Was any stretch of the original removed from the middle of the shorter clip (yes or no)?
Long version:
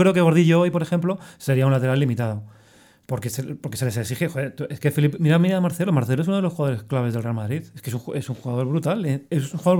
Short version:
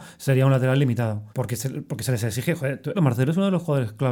yes